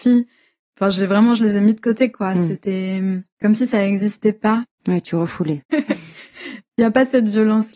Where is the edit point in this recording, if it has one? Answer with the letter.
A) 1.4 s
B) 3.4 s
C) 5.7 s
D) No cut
C